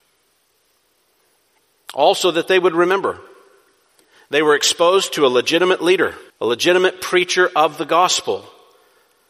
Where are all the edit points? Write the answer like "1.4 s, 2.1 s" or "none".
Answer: 6.3 s